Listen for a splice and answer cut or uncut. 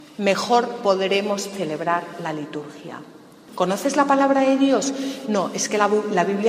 cut